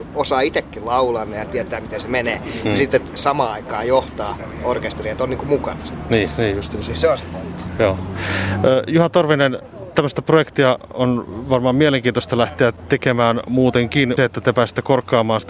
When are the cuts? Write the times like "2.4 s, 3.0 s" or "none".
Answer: 14.2 s